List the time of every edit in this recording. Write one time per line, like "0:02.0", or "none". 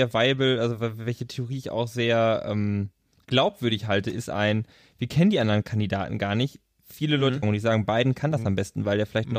0:07.4